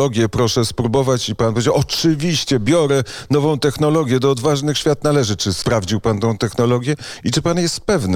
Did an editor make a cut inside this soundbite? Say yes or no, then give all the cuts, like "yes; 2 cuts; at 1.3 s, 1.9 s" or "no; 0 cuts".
no; 0 cuts